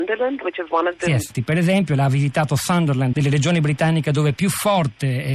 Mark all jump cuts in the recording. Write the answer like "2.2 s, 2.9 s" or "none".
1.3 s, 3.1 s